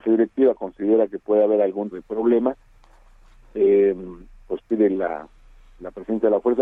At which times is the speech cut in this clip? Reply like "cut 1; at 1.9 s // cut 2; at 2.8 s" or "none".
cut 1; at 1.9 s